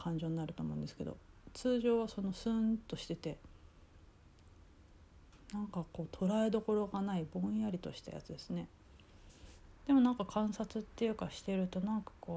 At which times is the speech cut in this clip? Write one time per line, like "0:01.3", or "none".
0:09.7